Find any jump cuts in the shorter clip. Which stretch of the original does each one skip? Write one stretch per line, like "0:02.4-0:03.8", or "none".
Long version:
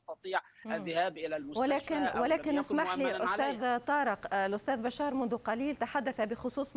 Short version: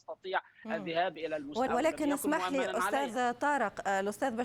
0:01.7-0:02.1